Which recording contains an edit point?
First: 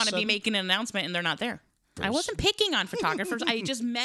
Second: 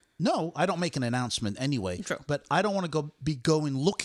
first; 1 cut; at 2.0 s

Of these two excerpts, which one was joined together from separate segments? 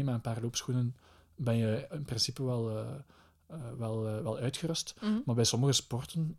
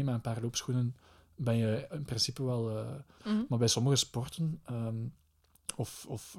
second; 1 cut; at 3.2 s

